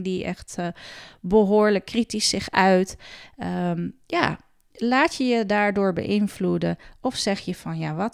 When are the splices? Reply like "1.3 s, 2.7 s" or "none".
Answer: none